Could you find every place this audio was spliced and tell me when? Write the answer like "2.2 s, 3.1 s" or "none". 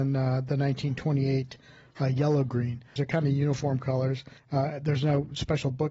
3.0 s, 4.4 s